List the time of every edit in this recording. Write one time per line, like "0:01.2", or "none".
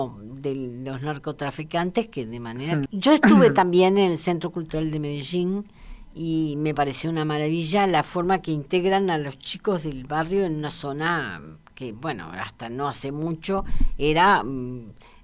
0:02.9